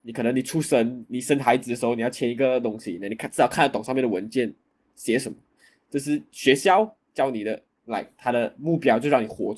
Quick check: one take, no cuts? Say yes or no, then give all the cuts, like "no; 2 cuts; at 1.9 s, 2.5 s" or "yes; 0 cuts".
yes; 0 cuts